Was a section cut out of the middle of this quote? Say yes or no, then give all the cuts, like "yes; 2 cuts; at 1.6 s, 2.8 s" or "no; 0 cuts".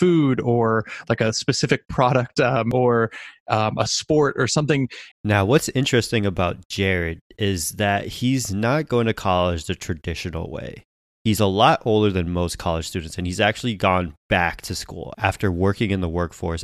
yes; 1 cut; at 5.1 s